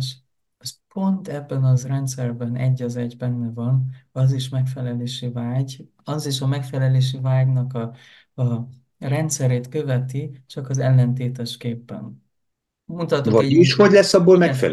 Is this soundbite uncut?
yes; 0 cuts

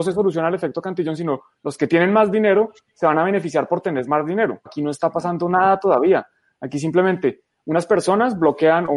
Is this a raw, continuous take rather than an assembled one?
no; 1 cut; at 4.7 s

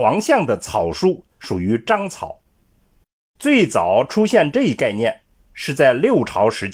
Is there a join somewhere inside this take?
yes; 1 cut; at 3.4 s

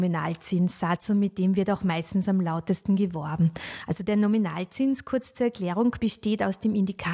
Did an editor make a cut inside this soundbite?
no; 0 cuts

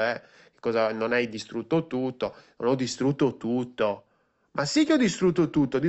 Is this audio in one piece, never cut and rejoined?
yes; 0 cuts

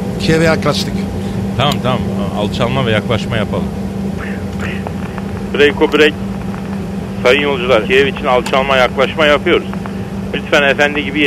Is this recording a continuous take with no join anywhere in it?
no; 3 cuts; at 5.5 s, 7.8 s, 10.3 s

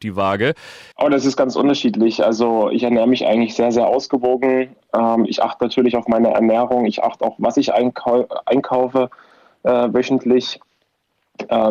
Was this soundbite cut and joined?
yes; 1 cut; at 0.9 s

